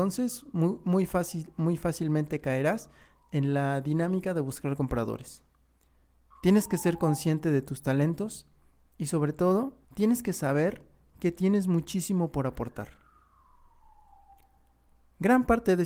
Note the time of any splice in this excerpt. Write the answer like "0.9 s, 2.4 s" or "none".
6.3 s, 9.8 s